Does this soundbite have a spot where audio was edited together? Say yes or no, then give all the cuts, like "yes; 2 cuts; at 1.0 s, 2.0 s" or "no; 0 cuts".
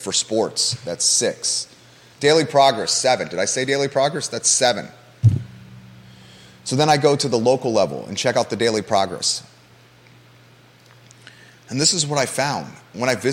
yes; 1 cut; at 2.1 s